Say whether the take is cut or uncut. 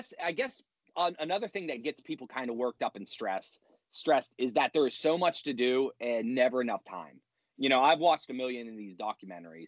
uncut